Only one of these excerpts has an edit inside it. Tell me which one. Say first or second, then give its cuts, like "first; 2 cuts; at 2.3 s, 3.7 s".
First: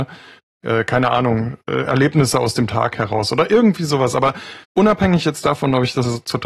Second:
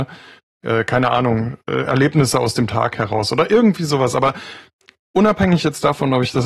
first; 1 cut; at 4.6 s